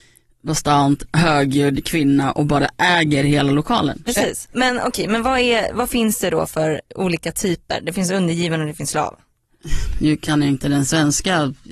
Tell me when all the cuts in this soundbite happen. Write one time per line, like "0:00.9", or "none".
0:04.1
0:06.9